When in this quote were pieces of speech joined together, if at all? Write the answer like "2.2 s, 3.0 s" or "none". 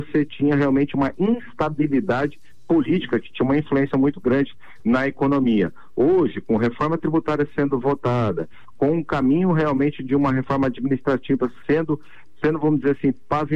none